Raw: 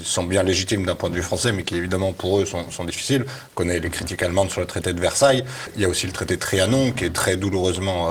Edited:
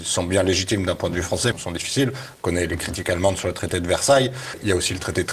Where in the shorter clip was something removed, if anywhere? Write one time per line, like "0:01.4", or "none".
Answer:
0:01.5